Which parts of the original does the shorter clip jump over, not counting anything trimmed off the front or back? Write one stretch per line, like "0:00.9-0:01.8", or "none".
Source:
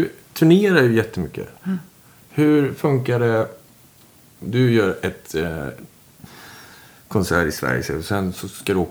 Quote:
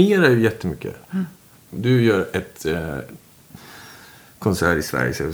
0:02.1-0:04.3